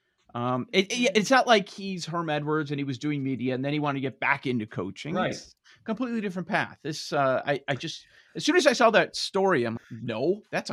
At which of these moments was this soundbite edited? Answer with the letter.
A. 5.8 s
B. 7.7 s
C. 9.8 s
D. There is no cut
C